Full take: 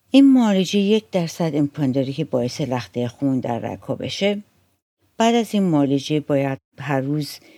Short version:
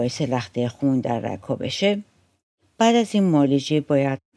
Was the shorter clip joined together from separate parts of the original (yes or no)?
no